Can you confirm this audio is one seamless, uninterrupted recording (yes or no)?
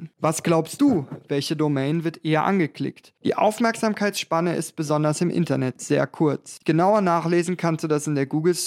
no